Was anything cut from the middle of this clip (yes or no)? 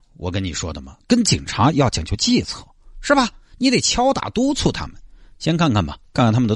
no